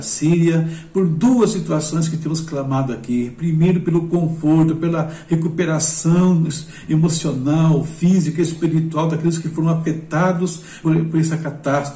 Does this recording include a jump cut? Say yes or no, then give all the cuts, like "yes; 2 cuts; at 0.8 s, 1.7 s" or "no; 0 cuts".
yes; 1 cut; at 10.8 s